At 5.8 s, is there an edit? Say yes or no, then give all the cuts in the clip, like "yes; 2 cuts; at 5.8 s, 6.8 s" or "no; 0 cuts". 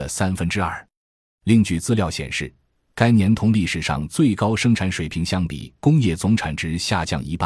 yes; 2 cuts; at 1.3 s, 5.8 s